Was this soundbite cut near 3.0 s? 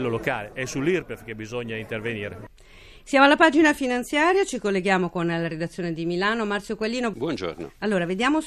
no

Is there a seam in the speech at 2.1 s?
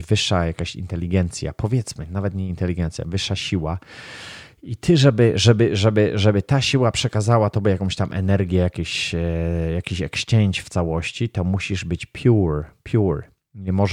no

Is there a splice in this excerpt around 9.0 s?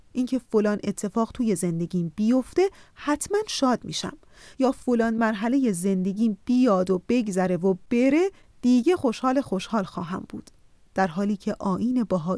no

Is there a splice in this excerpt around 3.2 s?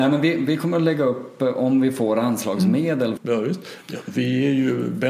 yes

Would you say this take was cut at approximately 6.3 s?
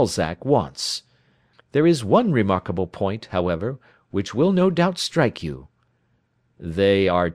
no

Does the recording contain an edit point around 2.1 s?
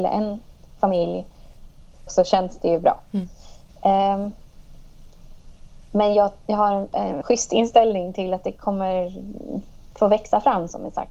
yes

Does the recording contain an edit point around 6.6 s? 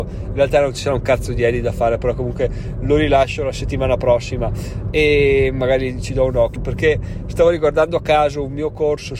yes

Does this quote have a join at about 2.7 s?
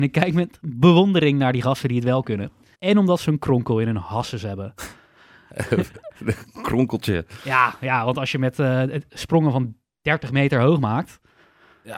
yes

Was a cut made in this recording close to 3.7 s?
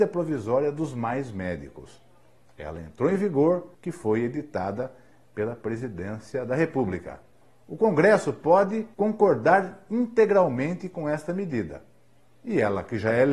yes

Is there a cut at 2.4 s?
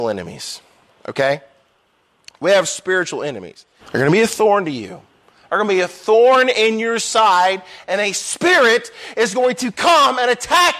no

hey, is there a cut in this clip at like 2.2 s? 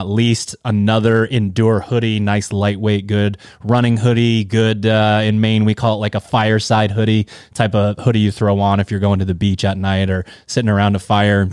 no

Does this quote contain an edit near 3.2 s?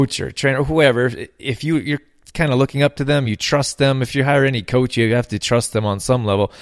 no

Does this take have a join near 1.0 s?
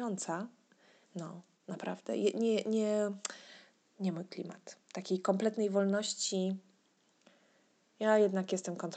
yes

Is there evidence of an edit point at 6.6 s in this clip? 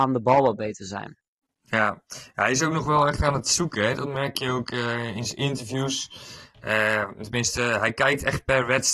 no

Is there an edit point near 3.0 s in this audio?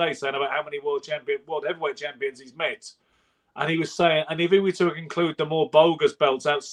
no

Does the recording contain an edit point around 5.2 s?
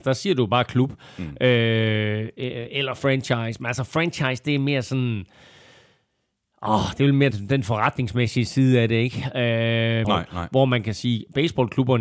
no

